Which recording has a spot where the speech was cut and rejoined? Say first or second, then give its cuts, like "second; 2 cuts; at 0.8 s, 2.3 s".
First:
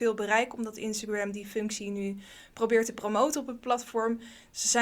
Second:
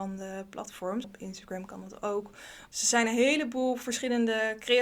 second; 2 cuts; at 1.0 s, 2.7 s